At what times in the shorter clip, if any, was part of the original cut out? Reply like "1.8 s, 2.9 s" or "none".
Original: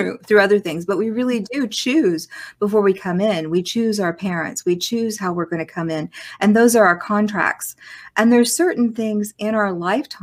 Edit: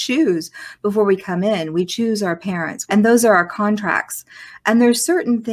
2.9 s

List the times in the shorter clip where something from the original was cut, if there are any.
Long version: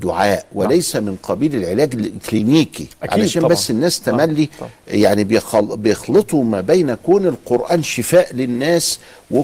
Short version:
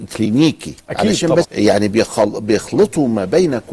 1.4 s

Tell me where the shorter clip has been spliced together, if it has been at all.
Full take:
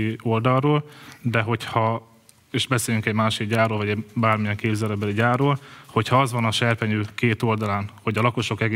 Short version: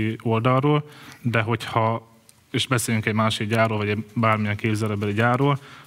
none

